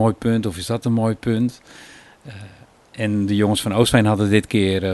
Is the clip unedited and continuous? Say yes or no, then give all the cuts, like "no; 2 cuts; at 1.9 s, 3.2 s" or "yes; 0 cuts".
yes; 0 cuts